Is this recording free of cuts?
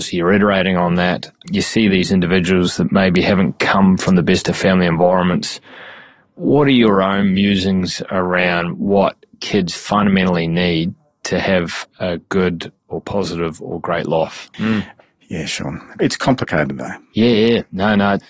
no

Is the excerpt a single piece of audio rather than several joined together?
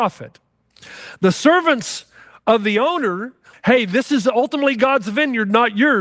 no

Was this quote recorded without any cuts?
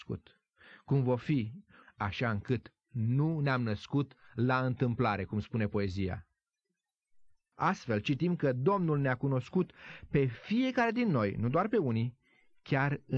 no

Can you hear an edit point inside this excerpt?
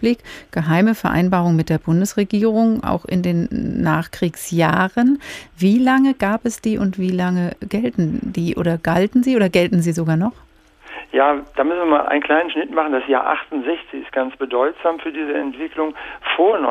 no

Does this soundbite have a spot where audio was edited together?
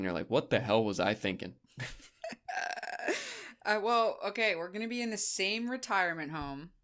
no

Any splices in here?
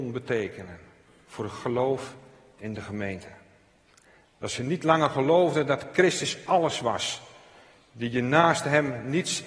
yes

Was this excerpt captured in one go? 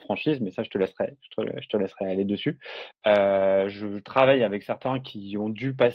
no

